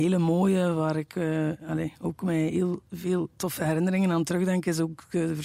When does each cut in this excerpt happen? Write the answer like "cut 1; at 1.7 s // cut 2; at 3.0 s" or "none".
none